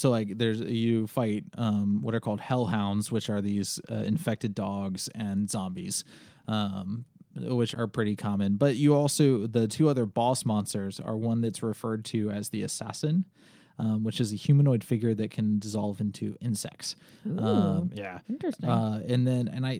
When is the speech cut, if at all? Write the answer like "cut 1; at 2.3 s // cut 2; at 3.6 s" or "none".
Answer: cut 1; at 7.7 s

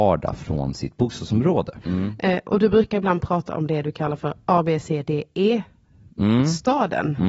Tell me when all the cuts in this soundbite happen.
cut 1; at 1.8 s

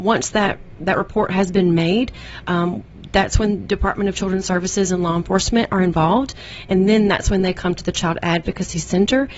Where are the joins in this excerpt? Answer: none

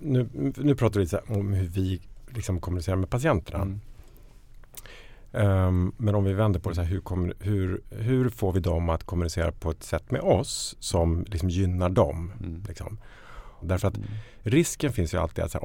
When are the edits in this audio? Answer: cut 1; at 13.6 s

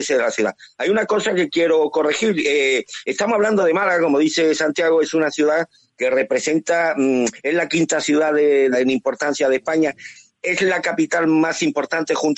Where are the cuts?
cut 1; at 8.7 s

